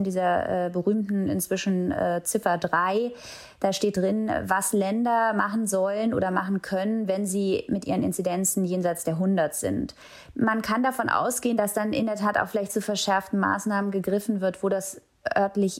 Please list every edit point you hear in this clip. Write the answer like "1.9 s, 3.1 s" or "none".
none